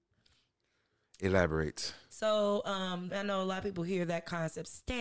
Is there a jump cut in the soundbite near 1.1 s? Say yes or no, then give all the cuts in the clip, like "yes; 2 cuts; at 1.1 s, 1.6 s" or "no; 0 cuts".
no; 1 cut; at 3.1 s